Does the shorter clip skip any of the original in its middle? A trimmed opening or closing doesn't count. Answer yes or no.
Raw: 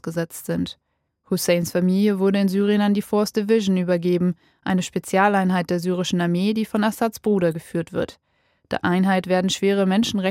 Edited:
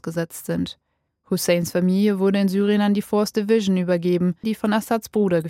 yes